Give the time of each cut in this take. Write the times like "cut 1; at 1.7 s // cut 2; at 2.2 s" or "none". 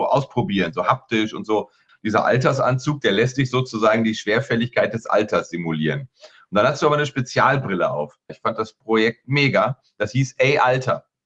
cut 1; at 1.9 s // cut 2; at 8.3 s